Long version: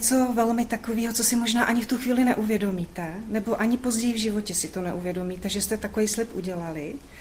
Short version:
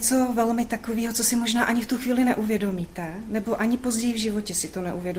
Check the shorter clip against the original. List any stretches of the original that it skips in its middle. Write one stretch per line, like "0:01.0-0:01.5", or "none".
none